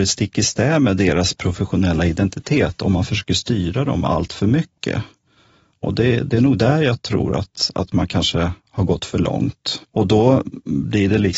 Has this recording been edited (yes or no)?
yes